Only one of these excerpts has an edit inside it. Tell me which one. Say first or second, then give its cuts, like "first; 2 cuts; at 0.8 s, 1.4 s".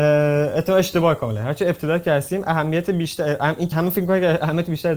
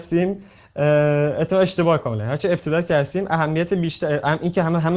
first; 1 cut; at 3.7 s